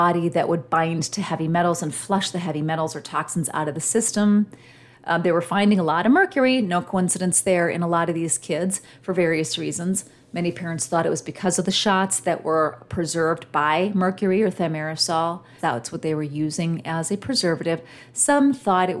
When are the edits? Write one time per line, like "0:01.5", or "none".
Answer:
0:15.6